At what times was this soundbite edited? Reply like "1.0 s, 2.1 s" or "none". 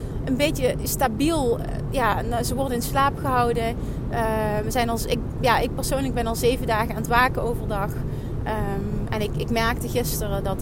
none